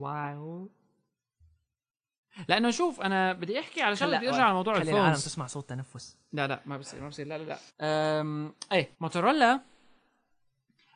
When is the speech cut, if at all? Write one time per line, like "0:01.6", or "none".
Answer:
0:07.7
0:08.9

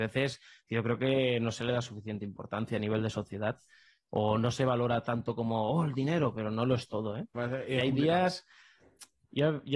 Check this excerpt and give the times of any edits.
0:07.3

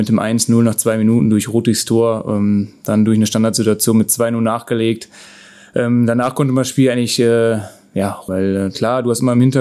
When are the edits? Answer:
0:08.3

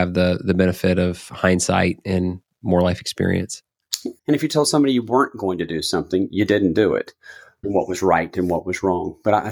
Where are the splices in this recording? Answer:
0:04.2
0:07.6

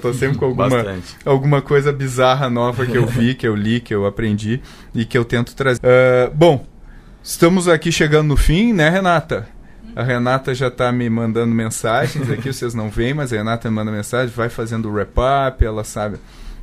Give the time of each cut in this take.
0:05.8

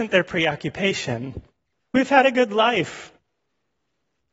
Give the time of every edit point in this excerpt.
0:01.8

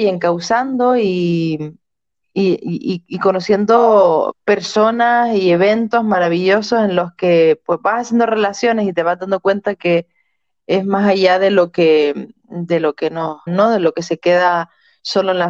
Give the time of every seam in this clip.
0:13.5

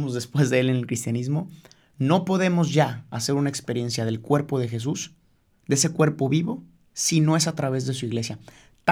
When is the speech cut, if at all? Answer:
none

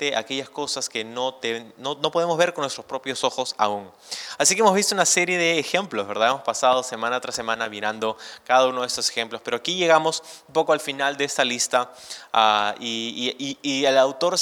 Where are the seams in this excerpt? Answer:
none

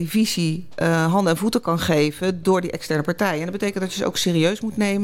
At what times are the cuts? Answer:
none

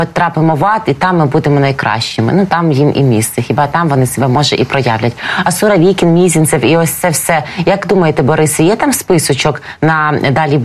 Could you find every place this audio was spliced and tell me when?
none

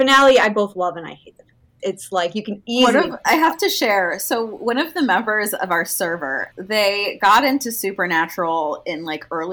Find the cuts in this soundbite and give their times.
0:01.8
0:06.5

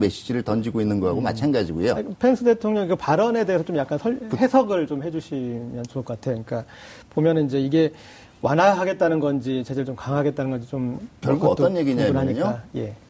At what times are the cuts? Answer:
none

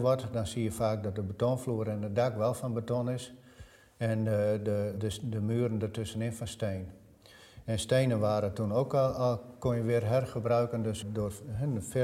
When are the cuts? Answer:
none

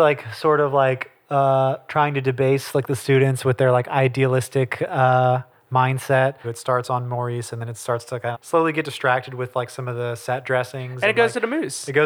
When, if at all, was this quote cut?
0:06.4
0:08.3

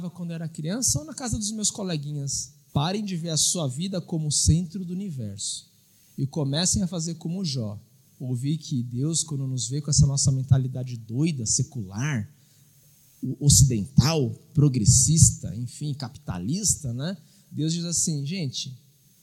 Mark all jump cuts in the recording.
0:02.7

